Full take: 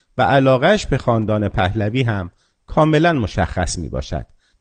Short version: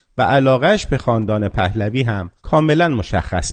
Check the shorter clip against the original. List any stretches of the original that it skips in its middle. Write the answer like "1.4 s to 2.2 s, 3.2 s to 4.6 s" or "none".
2.4 s to 2.6 s